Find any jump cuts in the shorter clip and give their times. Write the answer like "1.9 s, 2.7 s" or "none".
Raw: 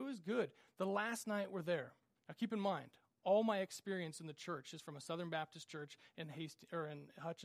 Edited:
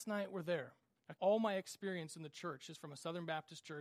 1.2 s